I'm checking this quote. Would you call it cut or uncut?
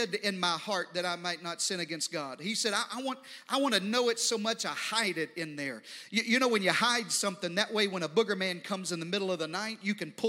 uncut